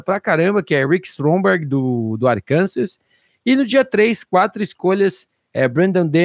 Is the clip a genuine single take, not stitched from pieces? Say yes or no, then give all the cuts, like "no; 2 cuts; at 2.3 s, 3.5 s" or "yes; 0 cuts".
yes; 0 cuts